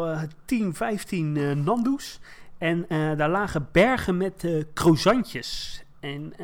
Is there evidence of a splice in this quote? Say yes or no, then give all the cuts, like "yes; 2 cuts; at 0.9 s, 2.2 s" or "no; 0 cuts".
no; 0 cuts